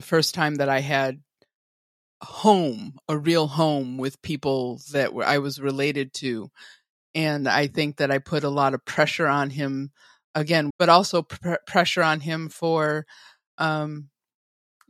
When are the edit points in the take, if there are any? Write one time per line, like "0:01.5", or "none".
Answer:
0:10.7